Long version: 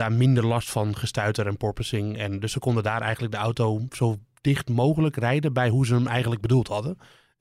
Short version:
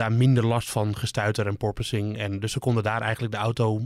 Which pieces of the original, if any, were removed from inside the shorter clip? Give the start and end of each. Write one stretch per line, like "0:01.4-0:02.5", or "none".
none